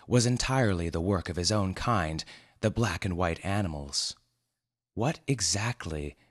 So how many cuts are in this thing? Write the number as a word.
zero